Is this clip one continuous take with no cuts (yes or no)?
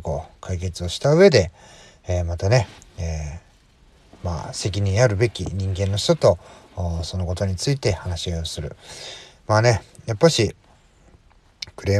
yes